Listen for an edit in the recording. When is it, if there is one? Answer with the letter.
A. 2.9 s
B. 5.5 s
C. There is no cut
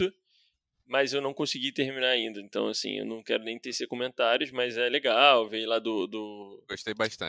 C